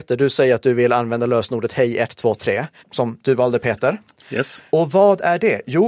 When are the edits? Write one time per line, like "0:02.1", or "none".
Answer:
0:02.8
0:04.7